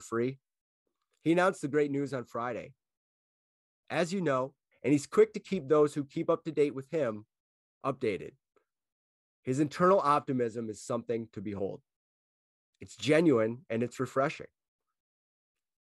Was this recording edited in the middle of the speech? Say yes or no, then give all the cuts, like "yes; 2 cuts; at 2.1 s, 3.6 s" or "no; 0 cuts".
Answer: yes; 1 cut; at 4.7 s